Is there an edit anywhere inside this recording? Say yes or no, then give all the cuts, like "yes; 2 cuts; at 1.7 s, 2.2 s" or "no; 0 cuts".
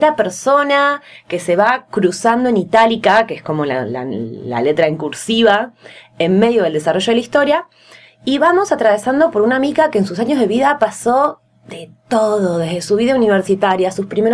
no; 0 cuts